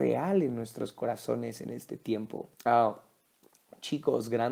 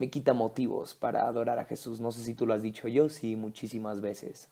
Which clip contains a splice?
first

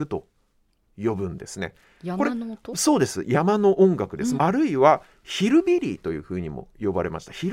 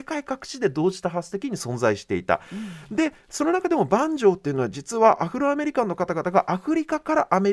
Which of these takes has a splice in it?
first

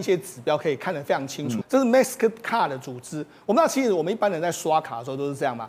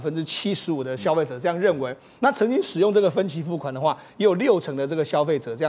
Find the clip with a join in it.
first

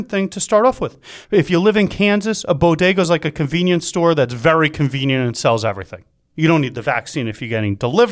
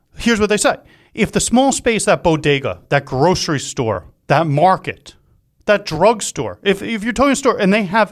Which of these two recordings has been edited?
first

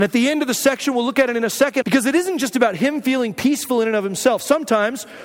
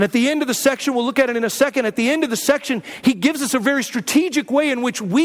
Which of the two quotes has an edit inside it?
first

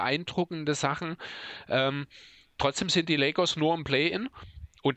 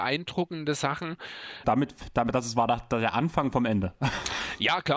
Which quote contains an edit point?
second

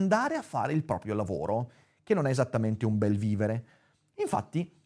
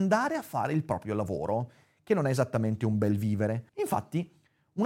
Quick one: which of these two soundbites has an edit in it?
second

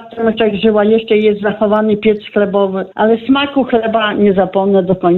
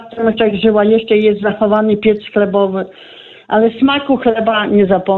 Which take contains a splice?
first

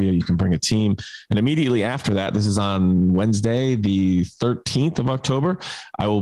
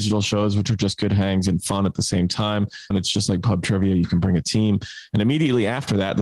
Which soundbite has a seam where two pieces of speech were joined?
second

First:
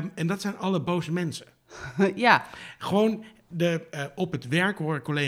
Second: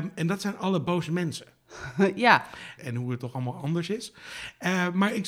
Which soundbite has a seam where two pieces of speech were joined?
second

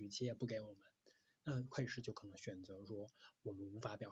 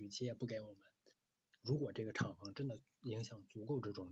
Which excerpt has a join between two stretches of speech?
second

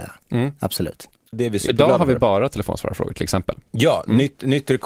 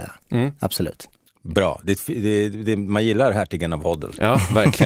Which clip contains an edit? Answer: first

